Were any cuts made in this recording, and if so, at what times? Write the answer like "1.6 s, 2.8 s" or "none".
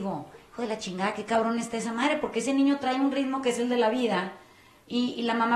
none